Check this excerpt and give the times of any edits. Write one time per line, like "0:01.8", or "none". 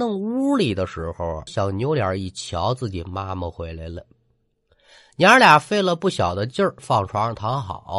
0:01.5
0:06.8

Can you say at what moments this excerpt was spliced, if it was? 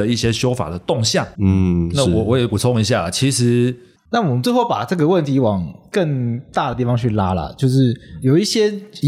0:01.4
0:04.0

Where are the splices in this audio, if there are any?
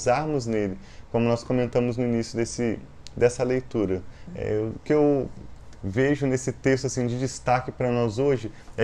0:04.3

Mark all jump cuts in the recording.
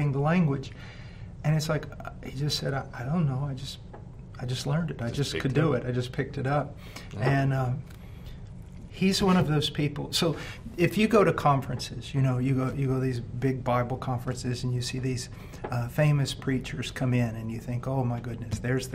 0:08.9

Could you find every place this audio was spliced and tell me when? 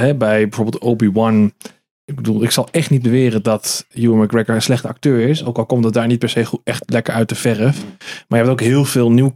0:03.9

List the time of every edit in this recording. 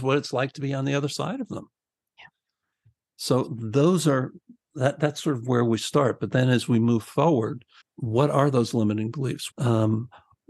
0:07.8
0:09.5

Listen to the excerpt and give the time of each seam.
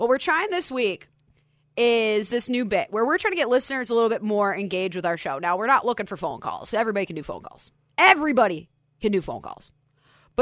none

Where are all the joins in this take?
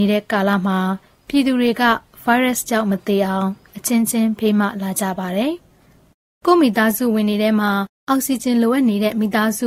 none

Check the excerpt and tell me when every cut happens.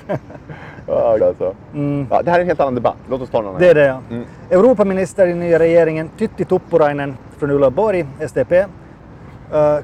0:01.2

